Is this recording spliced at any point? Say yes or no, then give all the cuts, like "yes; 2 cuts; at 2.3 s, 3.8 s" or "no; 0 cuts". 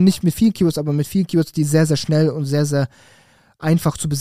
no; 0 cuts